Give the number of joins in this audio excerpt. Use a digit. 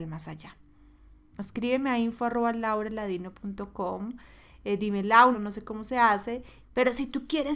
3